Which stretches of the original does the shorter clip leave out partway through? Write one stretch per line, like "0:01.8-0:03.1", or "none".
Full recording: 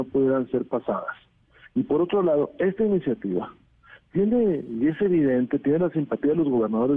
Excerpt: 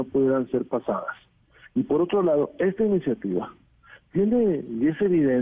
none